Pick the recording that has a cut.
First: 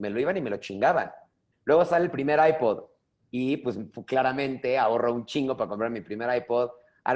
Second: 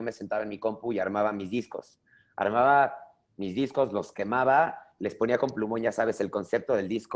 first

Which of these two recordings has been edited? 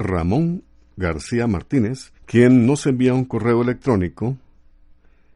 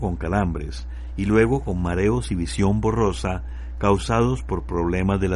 first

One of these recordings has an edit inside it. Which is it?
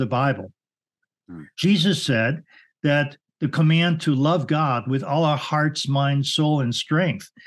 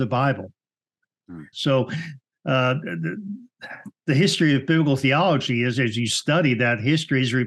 second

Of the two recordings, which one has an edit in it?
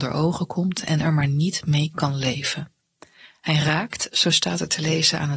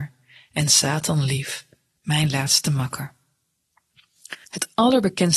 second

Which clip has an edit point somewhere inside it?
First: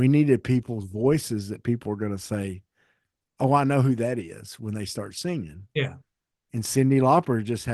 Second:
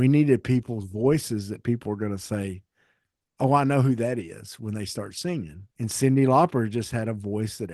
second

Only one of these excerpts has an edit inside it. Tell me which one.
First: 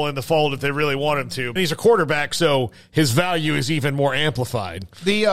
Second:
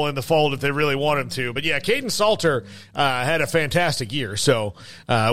first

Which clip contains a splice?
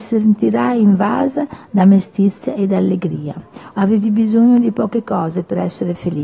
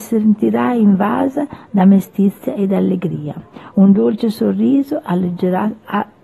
first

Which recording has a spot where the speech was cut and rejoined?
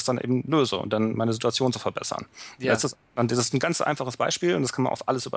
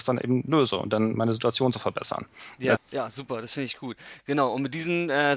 second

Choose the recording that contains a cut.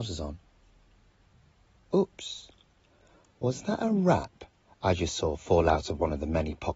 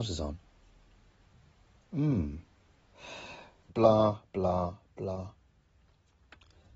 second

